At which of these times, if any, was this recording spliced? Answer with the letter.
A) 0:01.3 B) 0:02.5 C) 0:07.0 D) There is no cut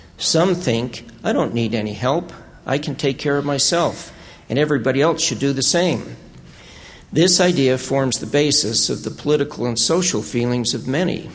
D